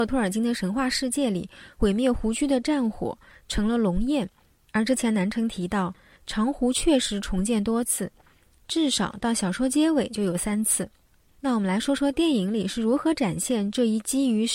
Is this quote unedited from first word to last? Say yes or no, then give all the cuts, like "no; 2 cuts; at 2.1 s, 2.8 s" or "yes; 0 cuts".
yes; 0 cuts